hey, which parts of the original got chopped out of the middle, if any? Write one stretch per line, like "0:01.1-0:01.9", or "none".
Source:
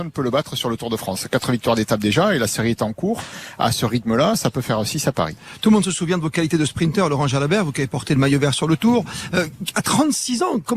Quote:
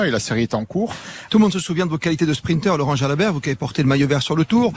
0:03.6-0:05.6